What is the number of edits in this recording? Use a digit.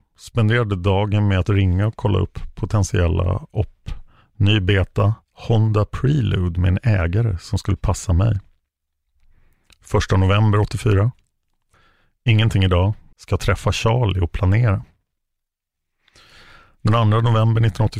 1